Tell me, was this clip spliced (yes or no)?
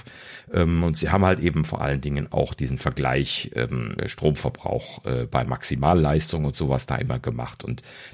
yes